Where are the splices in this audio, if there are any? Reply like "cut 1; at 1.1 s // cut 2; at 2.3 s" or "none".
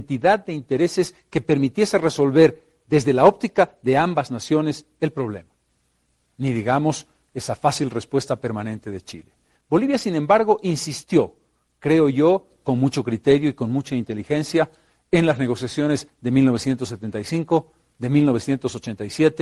none